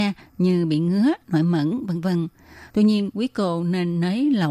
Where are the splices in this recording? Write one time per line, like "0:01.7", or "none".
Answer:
0:02.7